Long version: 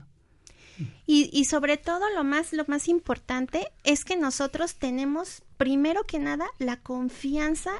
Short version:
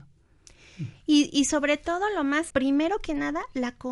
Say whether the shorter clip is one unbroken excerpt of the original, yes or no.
no